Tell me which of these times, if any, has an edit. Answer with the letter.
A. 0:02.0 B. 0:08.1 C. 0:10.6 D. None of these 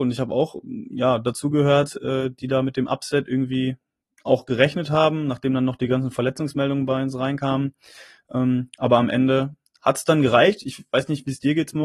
D